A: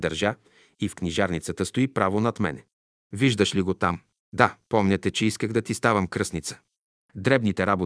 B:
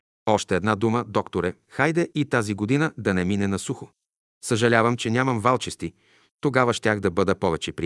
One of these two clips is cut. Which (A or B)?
A